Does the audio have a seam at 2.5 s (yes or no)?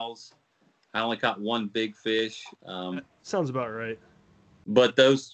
yes